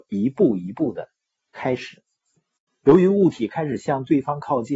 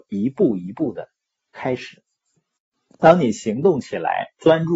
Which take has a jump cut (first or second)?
first